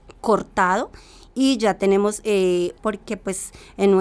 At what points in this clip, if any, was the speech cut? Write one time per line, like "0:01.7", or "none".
0:02.8